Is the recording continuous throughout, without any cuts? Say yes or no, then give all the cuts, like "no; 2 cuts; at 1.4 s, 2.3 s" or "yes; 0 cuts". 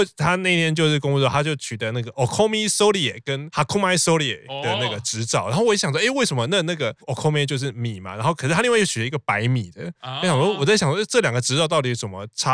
yes; 0 cuts